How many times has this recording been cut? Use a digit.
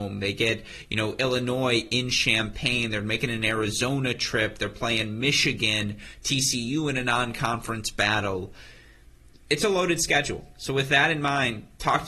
0